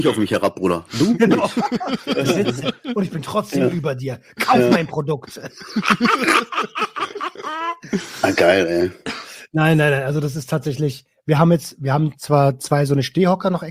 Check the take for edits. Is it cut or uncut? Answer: uncut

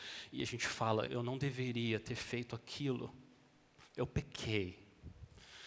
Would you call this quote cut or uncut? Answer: cut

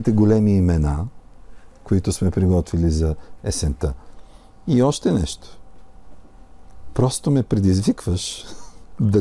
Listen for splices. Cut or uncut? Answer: uncut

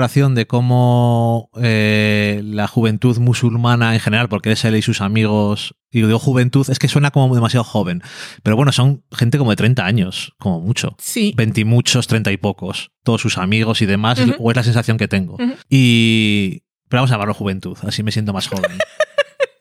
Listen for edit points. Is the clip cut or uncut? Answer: uncut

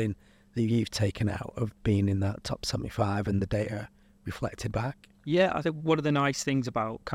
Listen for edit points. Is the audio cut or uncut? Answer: uncut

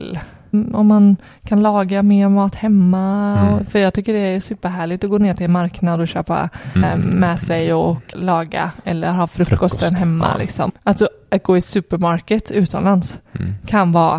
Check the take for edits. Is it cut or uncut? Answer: cut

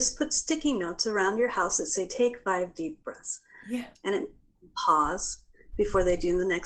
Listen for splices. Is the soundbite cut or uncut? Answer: uncut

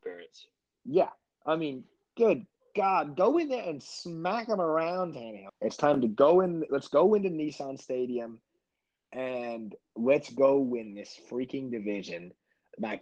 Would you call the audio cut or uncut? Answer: cut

